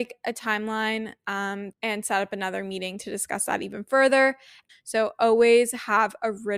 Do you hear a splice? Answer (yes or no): yes